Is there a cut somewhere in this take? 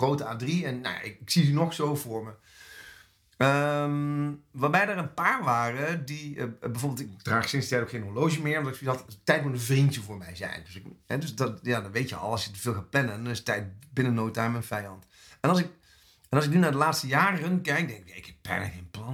no; 0 cuts

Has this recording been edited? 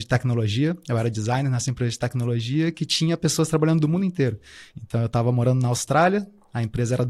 no; 0 cuts

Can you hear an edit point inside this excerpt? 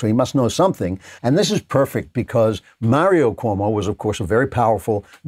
yes; 1 cut; at 1.2 s

